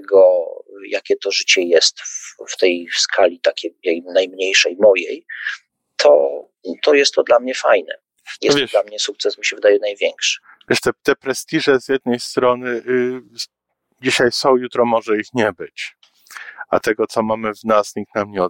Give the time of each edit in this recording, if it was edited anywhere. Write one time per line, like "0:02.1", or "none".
none